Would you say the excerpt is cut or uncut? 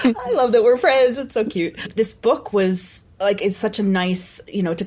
cut